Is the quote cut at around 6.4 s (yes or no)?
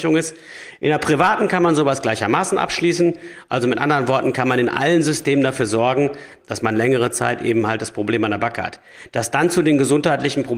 yes